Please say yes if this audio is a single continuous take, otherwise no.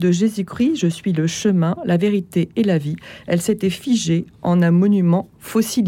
yes